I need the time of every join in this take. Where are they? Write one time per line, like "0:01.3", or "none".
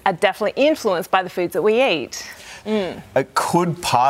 0:02.6